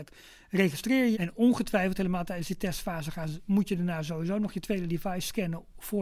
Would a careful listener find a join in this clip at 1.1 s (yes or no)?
yes